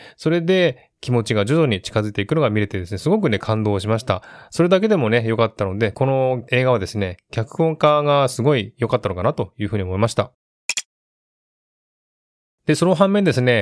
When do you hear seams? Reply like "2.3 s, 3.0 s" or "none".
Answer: none